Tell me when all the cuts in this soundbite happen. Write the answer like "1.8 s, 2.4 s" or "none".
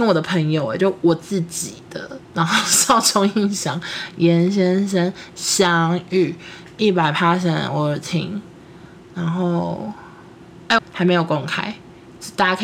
10.8 s